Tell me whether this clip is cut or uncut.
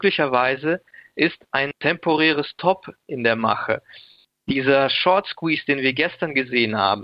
uncut